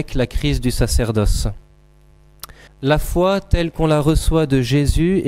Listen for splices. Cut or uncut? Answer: cut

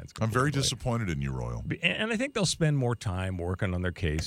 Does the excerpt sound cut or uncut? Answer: uncut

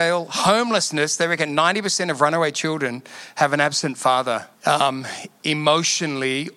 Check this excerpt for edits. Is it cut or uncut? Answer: cut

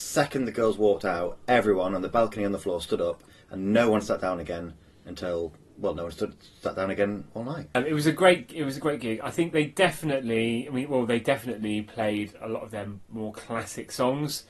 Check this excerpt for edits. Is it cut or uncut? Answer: uncut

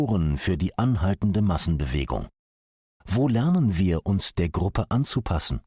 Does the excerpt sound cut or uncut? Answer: cut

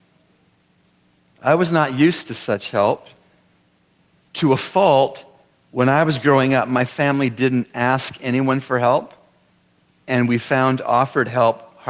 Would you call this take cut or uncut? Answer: uncut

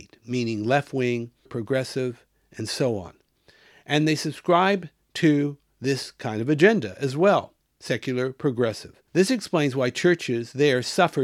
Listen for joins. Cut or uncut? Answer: cut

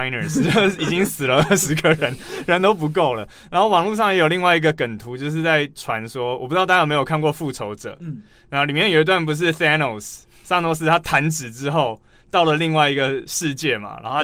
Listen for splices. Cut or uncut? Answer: uncut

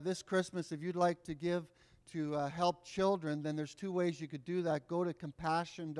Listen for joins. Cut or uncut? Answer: uncut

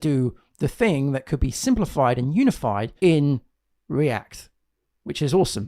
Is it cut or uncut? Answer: cut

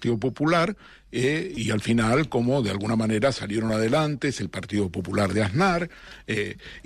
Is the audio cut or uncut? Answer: uncut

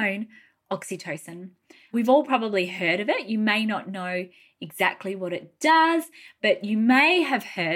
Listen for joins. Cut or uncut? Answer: cut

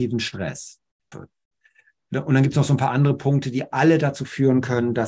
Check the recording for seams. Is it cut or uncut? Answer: cut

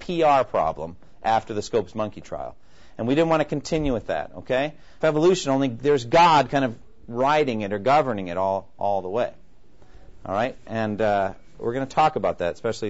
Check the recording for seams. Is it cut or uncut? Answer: cut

